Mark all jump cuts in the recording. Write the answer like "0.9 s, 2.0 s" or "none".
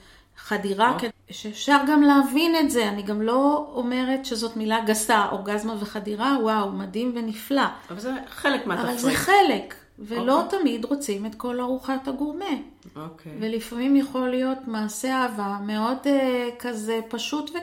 1.1 s